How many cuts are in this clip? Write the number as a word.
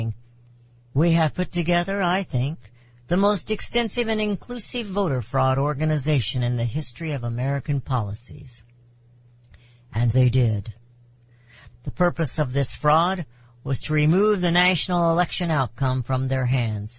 two